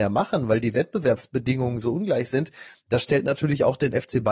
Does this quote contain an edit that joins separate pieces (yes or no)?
no